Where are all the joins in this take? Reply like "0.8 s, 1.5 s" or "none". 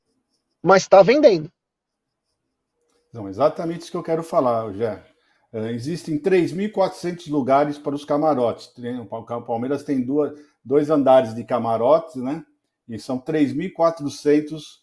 none